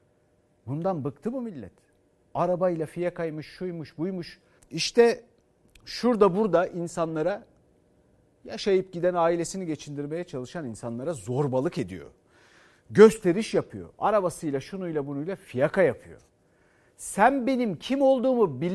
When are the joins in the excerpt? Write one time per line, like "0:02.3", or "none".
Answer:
0:04.6